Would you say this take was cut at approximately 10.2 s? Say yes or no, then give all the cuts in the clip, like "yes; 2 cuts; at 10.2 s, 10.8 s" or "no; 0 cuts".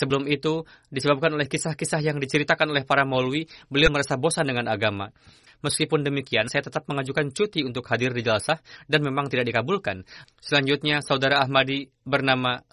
yes; 2 cuts; at 5.5 s, 10.2 s